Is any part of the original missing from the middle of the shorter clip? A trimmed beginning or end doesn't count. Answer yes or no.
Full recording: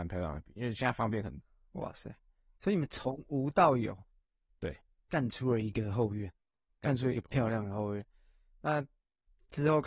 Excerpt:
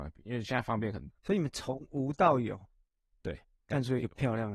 yes